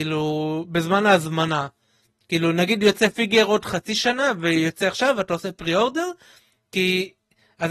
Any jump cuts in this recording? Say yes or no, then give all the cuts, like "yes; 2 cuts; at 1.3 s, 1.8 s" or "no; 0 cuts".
no; 0 cuts